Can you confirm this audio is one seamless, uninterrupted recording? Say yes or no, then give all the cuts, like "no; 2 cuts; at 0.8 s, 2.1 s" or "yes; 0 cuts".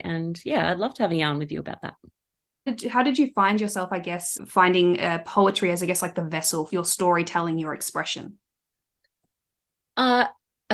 no; 2 cuts; at 4.4 s, 6.7 s